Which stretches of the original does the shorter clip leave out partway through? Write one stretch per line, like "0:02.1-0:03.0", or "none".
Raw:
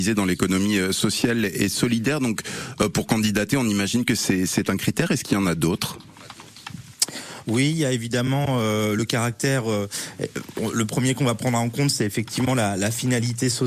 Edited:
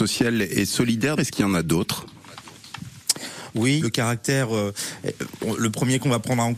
0:02.2-0:05.1
0:07.7-0:09.0

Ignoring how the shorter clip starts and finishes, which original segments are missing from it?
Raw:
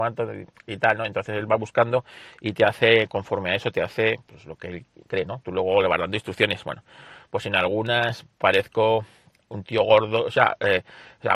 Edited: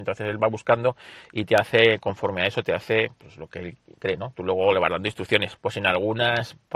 0:06.6-0:07.2

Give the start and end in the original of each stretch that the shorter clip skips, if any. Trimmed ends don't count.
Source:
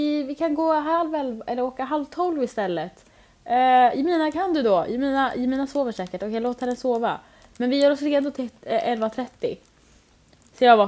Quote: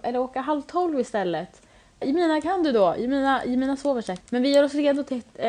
0:03.4-0:03.9
0:06.1-0:07.5

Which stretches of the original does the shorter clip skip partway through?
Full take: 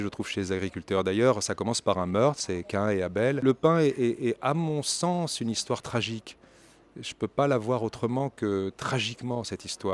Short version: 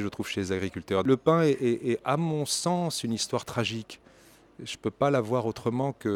0:01.0-0:03.4

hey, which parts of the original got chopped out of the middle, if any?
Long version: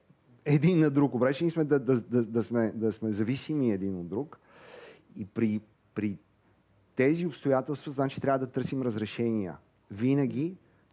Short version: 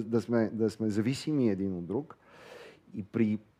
none

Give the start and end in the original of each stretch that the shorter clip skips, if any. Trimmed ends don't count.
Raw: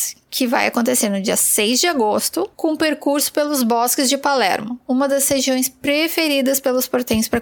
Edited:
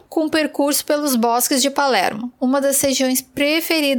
none

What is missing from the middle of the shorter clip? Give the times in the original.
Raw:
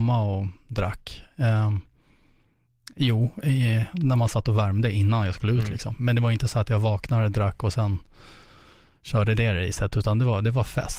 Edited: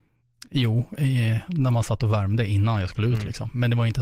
none

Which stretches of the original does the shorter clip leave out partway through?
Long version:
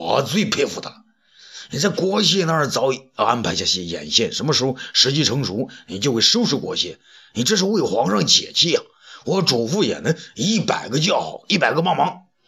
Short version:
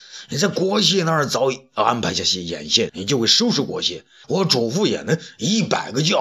0:04.3-0:05.8
0:07.2-0:09.2

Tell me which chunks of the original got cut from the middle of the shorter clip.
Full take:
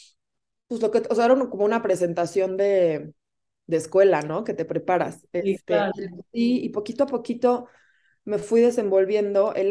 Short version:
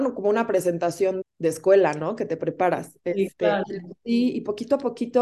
0:02.6-0:03.5

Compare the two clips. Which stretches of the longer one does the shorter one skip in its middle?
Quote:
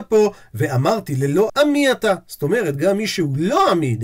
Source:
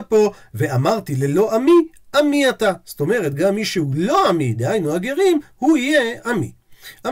0:01.5-0:02.1

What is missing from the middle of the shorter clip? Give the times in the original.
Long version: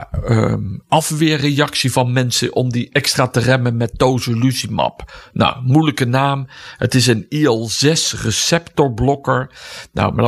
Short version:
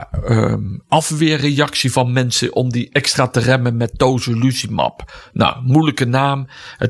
none

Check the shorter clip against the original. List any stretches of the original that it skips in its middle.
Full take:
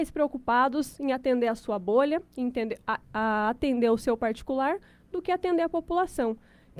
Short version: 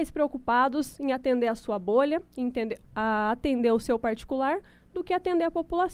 0:02.8-0:03.0

